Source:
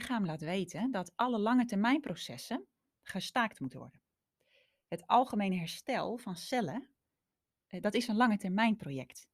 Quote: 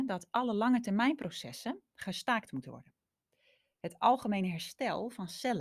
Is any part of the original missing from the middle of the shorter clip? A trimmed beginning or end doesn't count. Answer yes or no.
yes